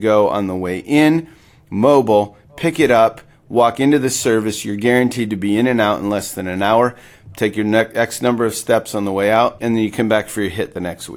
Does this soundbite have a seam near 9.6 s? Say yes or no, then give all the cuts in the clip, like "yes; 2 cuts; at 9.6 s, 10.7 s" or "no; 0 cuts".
yes; 1 cut; at 9.6 s